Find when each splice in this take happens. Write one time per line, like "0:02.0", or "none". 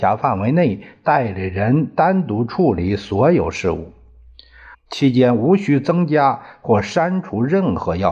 0:04.7